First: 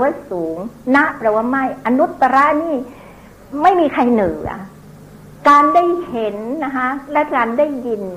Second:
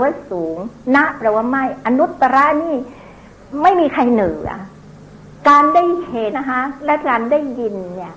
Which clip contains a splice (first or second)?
second